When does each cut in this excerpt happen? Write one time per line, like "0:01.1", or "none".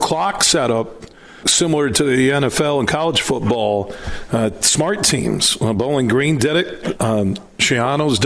0:01.4